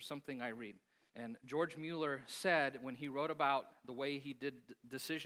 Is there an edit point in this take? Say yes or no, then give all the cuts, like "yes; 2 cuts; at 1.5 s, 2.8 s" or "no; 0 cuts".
yes; 1 cut; at 1.1 s